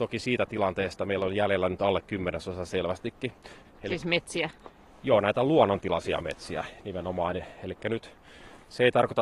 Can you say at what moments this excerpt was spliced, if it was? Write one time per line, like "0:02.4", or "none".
0:03.6